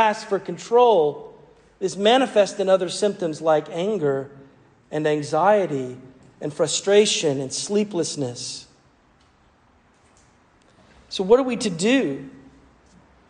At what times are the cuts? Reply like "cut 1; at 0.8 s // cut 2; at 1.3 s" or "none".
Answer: none